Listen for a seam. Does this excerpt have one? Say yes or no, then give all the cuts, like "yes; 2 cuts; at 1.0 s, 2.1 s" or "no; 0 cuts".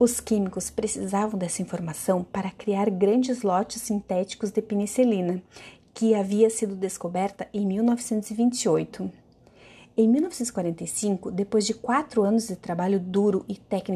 no; 0 cuts